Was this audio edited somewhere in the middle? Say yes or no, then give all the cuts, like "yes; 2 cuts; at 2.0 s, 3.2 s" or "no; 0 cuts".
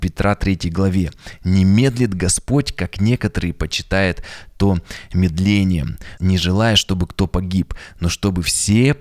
yes; 1 cut; at 6.2 s